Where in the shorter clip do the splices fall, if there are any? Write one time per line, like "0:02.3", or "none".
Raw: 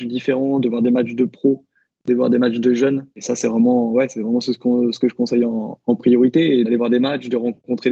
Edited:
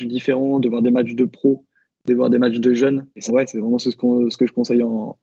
0:03.3